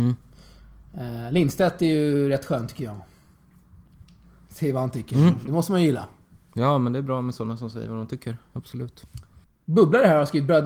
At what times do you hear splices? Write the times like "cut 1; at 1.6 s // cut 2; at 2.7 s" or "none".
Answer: cut 1; at 9.4 s

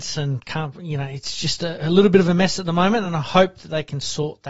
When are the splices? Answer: none

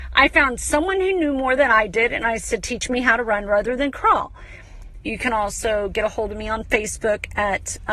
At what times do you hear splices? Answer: cut 1; at 5.0 s

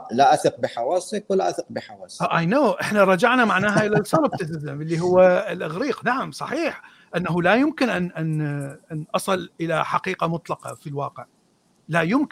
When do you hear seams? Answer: none

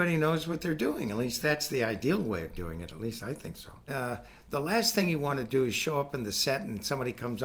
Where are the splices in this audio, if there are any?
cut 1; at 3.9 s

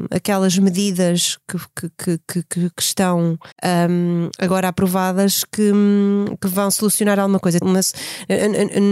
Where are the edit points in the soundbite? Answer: cut 1; at 3.5 s // cut 2; at 7.6 s

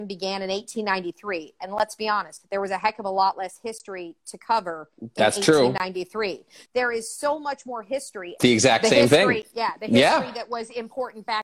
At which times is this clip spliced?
cut 1; at 6.6 s // cut 2; at 8.4 s

